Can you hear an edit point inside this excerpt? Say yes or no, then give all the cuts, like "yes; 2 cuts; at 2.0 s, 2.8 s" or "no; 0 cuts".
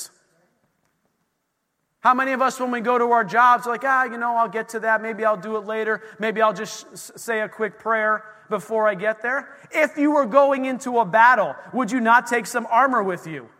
no; 0 cuts